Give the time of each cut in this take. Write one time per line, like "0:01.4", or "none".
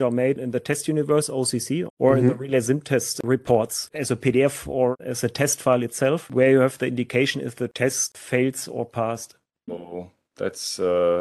0:01.9
0:09.7